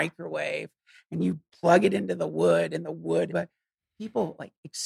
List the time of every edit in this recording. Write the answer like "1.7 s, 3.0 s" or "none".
3.3 s

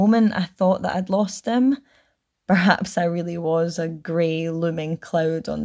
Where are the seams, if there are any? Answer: 2.3 s

